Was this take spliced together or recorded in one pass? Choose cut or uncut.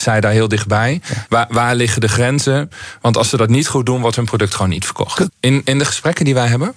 cut